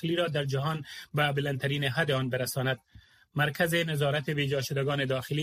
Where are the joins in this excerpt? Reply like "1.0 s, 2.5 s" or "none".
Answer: none